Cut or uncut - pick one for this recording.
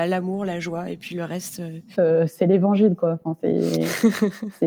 cut